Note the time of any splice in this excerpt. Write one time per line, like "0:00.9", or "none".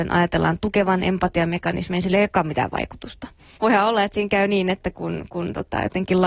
0:03.6